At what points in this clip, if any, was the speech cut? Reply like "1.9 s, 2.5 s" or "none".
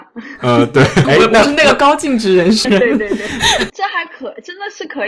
1.0 s, 2.6 s, 3.7 s